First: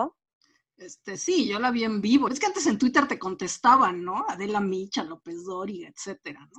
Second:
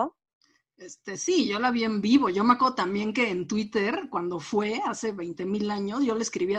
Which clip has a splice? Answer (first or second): first